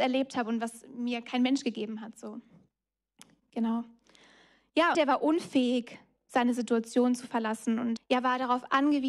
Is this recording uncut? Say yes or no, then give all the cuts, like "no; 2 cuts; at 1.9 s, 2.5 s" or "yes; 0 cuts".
no; 2 cuts; at 4.9 s, 8.0 s